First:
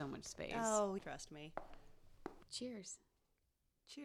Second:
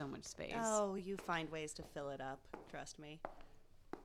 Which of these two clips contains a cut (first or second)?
first